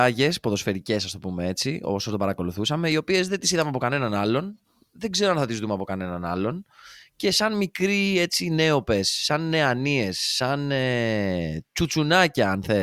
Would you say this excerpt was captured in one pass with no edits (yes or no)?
yes